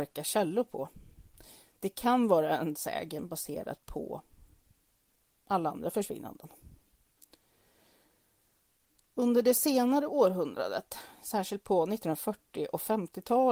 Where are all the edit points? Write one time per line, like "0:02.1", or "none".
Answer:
none